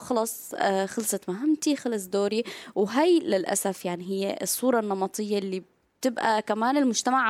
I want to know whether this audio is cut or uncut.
uncut